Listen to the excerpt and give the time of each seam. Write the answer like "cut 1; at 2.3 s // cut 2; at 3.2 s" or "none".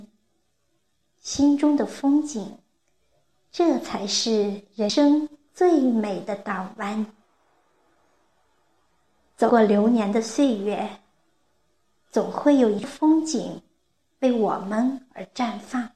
none

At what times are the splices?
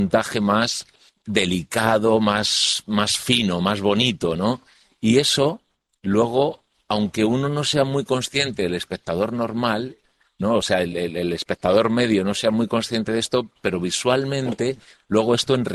none

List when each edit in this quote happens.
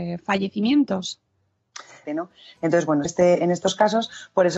cut 1; at 2.1 s // cut 2; at 3.1 s

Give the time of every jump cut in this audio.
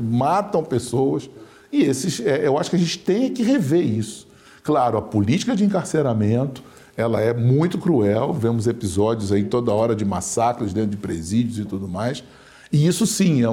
none

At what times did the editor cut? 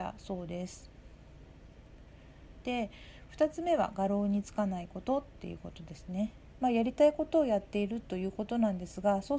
cut 1; at 2.6 s // cut 2; at 6.5 s

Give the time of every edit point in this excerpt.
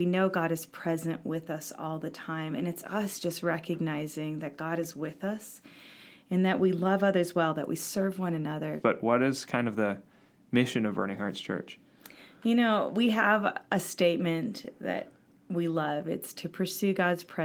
cut 1; at 8.8 s

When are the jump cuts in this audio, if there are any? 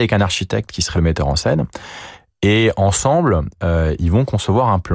cut 1; at 0.9 s

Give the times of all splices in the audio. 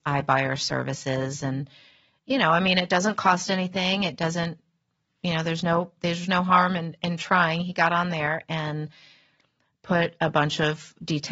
none

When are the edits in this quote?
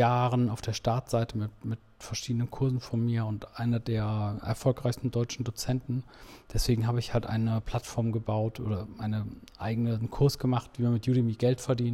none

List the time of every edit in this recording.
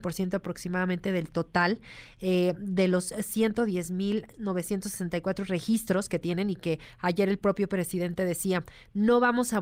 none

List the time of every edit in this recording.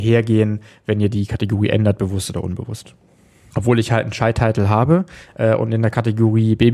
cut 1; at 3.5 s

